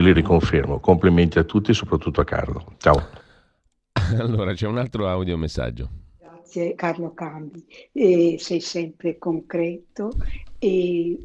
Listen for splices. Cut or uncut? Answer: cut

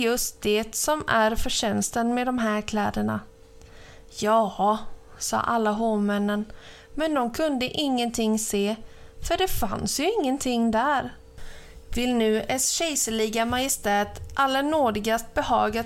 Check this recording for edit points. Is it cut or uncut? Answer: uncut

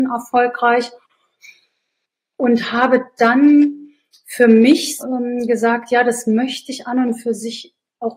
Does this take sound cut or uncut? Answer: cut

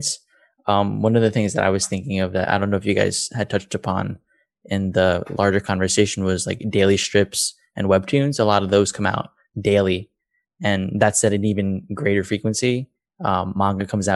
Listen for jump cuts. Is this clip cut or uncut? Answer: uncut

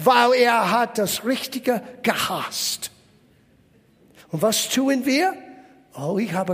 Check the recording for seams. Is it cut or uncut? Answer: uncut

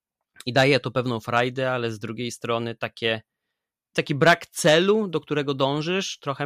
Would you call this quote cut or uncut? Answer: cut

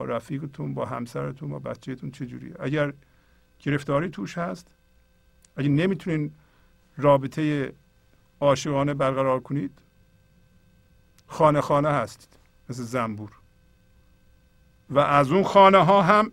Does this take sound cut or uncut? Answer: uncut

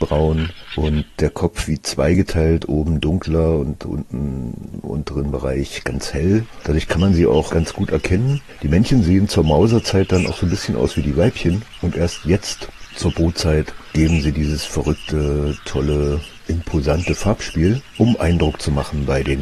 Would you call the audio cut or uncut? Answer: uncut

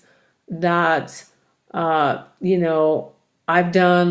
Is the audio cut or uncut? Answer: uncut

